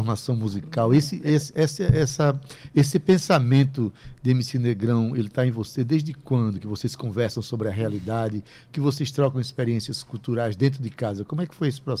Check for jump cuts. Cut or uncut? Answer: uncut